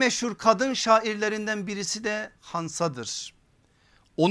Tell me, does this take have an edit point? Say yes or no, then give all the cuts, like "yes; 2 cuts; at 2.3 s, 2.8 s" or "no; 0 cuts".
no; 0 cuts